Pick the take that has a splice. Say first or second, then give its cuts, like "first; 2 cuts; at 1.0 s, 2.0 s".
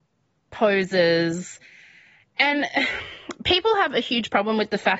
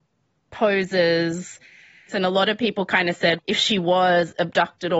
second; 2 cuts; at 2.1 s, 3.4 s